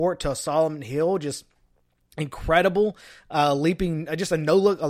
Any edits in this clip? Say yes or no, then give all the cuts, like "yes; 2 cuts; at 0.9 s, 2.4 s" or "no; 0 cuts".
no; 0 cuts